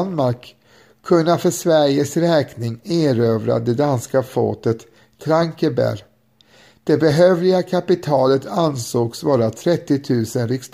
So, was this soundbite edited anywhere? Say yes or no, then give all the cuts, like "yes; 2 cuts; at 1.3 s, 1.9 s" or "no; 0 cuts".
no; 0 cuts